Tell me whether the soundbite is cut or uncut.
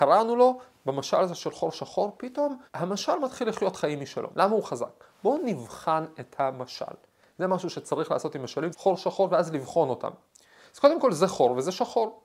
cut